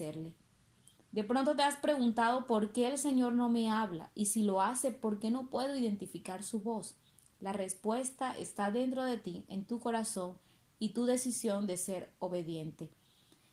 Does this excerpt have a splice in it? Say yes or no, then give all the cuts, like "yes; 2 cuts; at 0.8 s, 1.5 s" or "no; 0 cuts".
no; 0 cuts